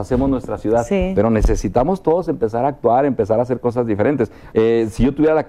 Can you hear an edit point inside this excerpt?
yes; 1 cut; at 4.5 s

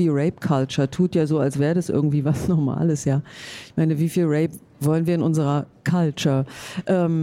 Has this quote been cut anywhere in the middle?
no; 0 cuts

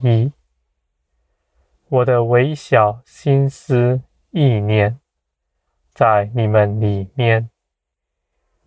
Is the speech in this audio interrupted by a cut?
no; 0 cuts

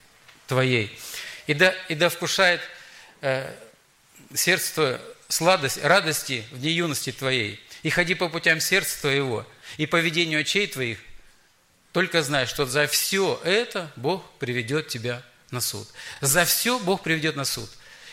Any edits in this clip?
no; 0 cuts

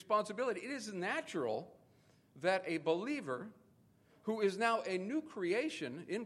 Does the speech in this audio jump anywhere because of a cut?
no; 0 cuts

